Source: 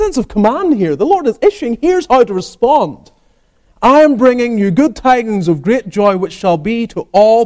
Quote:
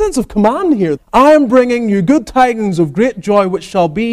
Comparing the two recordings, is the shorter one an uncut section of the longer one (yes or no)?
no